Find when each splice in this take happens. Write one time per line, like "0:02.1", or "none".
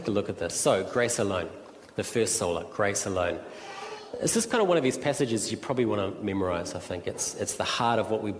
none